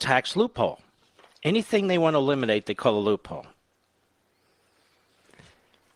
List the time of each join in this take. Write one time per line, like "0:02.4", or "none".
none